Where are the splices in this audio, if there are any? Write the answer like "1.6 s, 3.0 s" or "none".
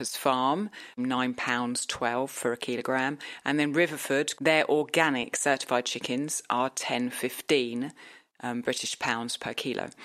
1.0 s, 4.3 s